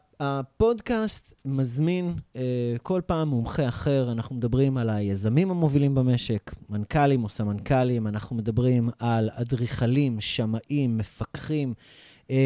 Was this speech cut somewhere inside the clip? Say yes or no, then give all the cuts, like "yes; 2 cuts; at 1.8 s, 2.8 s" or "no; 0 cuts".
no; 0 cuts